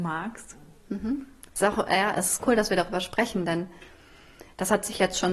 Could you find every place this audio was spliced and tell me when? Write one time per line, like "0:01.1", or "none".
0:01.5